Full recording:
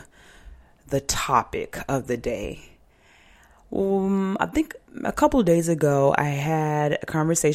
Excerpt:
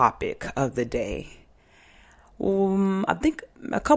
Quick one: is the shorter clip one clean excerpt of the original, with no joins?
yes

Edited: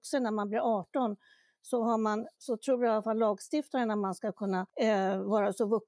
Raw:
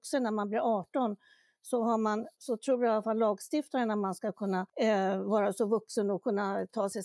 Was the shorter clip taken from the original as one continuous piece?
yes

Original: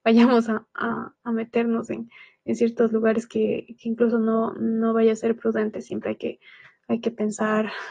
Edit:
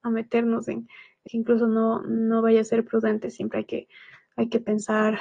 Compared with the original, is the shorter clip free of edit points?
no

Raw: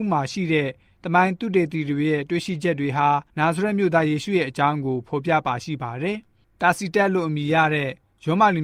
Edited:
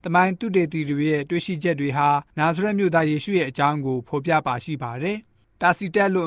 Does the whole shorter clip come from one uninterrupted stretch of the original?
yes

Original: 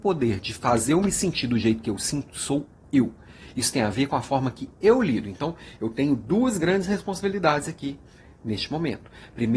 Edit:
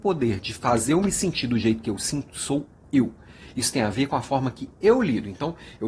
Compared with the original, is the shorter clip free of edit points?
yes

